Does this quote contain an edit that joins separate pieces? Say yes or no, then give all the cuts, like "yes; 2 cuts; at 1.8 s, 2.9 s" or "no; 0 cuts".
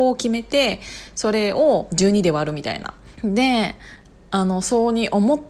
yes; 1 cut; at 3.2 s